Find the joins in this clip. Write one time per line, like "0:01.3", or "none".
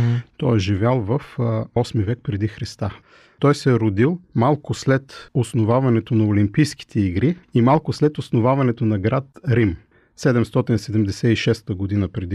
0:07.4